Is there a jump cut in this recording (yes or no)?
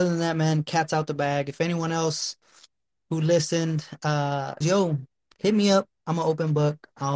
yes